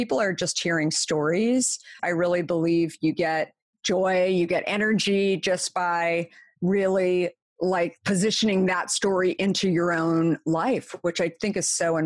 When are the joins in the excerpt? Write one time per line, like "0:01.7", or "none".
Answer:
0:02.0